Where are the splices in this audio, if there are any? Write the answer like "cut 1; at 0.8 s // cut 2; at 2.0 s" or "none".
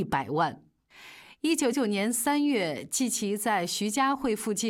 cut 1; at 1.7 s